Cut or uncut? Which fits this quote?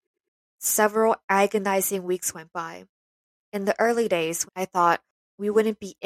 cut